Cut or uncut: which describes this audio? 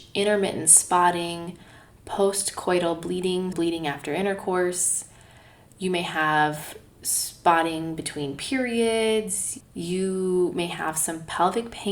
cut